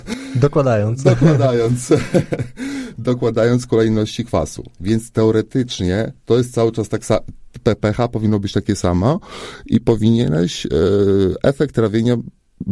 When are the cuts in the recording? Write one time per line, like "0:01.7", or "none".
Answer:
none

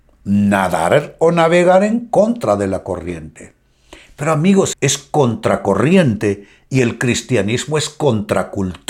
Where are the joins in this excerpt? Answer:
0:04.7

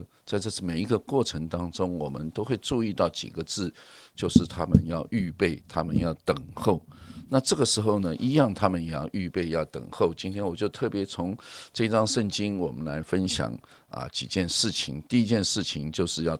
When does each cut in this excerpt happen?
none

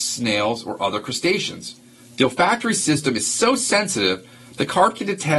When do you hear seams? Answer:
0:02.0

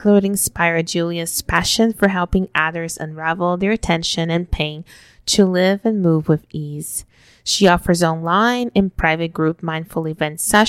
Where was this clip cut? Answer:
none

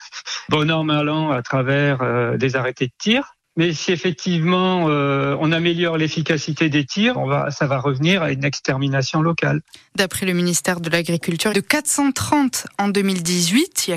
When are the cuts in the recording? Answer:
0:07.1
0:11.5

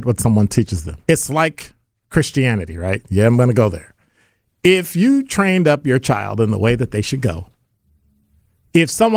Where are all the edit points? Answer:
0:01.0

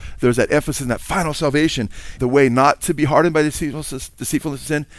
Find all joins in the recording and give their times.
0:02.2

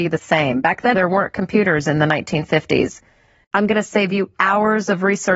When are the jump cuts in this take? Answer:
0:00.9
0:03.4

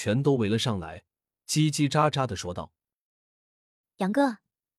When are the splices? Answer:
none

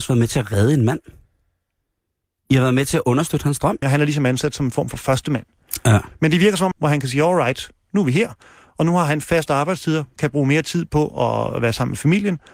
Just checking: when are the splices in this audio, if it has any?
0:03.8
0:06.7

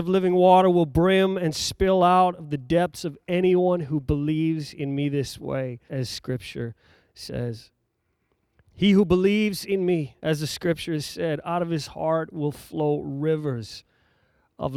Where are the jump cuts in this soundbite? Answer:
0:05.9
0:08.6
0:10.2

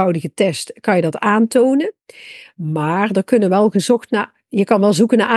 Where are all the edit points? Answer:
none

